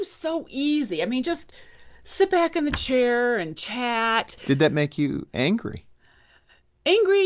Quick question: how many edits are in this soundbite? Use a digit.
0